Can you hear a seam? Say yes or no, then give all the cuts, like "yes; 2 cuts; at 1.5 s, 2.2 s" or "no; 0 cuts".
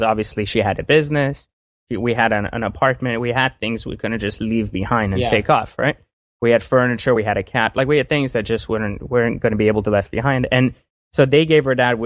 no; 0 cuts